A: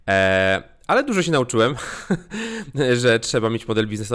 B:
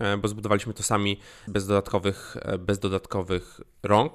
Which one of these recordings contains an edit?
B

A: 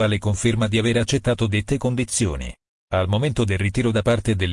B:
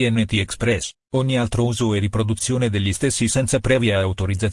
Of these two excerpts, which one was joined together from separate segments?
B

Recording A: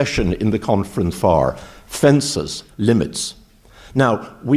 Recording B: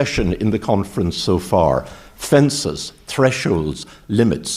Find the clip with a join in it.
A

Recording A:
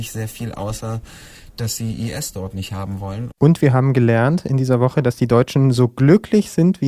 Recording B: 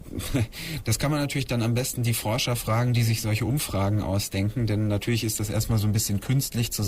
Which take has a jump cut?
A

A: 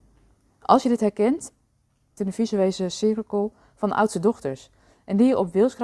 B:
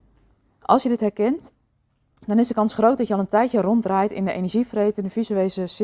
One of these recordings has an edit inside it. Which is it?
A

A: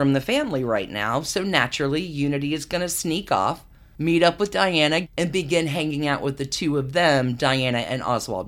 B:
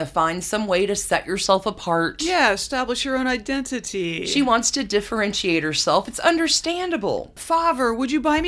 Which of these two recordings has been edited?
A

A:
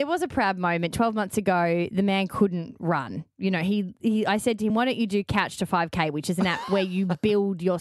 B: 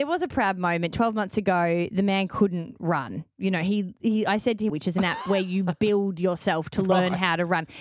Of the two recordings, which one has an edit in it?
B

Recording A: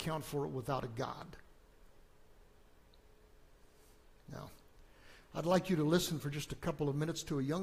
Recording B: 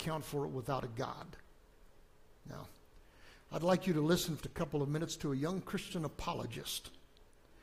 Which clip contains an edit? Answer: B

